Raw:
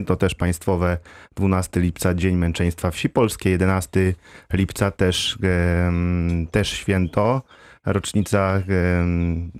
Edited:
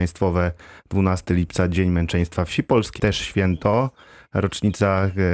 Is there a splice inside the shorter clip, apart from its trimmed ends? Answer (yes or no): yes